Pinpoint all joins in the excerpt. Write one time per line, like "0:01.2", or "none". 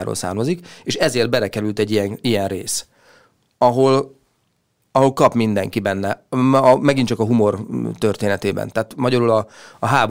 none